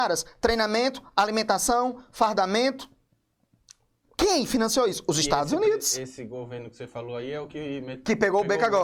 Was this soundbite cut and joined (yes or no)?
no